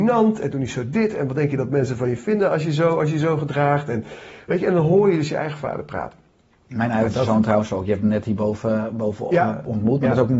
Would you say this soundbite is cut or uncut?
uncut